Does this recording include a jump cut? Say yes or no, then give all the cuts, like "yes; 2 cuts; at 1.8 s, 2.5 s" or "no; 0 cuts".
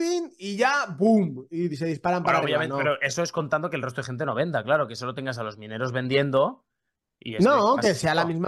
no; 0 cuts